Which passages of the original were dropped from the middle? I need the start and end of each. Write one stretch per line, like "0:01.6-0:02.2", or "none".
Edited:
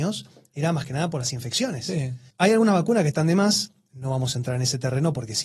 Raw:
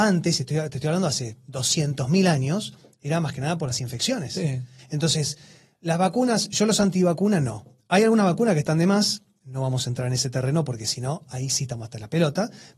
0:04.8-0:07.8